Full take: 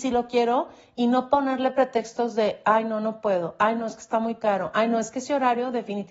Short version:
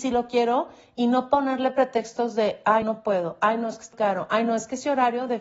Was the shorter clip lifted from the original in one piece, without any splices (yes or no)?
no